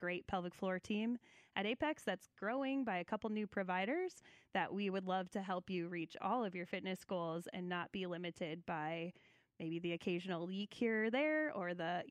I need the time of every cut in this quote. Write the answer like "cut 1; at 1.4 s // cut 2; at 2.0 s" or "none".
none